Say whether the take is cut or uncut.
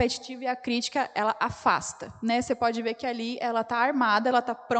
uncut